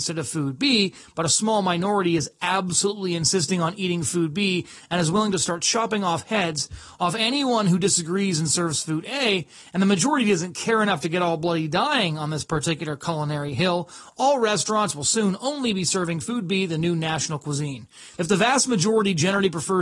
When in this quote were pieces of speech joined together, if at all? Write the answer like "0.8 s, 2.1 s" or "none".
18.1 s

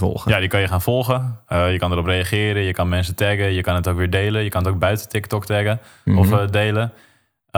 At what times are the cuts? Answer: none

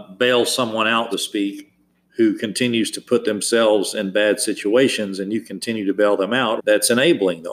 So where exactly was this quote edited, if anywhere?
1.1 s, 6.6 s

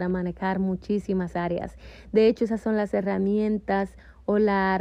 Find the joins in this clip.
none

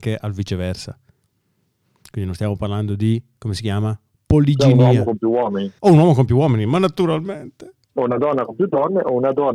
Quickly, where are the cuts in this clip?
5.8 s, 7.8 s

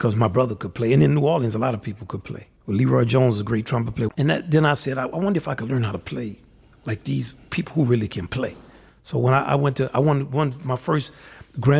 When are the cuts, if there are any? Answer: 2.6 s, 4.1 s, 8.9 s

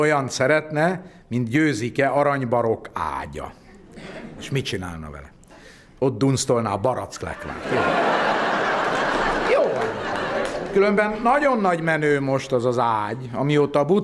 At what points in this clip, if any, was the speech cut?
none

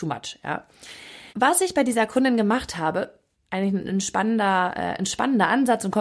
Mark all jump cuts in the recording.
1.3 s, 3.3 s

